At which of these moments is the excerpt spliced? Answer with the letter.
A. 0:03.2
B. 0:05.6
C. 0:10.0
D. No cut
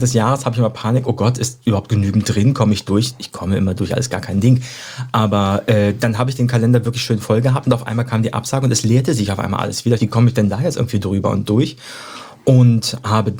C